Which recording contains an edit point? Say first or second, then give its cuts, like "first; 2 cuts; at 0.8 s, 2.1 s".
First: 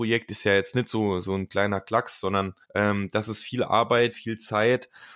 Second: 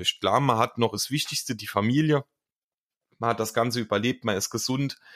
first; 2 cuts; at 2.6 s, 4.1 s